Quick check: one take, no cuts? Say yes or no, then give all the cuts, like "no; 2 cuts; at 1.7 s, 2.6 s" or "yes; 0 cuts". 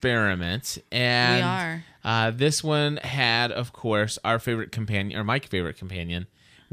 yes; 0 cuts